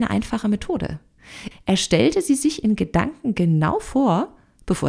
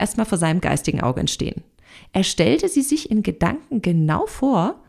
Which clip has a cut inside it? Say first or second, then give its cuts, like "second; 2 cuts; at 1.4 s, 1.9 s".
first; 1 cut; at 1.5 s